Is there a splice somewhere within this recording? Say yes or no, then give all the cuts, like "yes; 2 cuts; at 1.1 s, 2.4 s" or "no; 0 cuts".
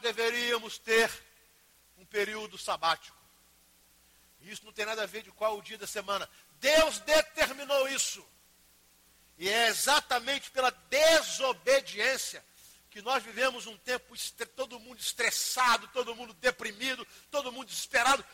no; 0 cuts